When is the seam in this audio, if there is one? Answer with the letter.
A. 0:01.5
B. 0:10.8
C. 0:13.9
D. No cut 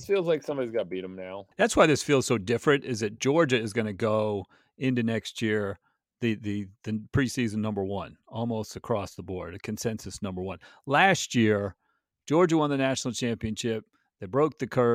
A